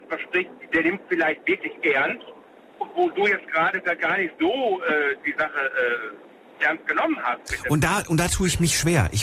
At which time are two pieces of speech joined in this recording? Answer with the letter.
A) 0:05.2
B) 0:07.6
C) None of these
C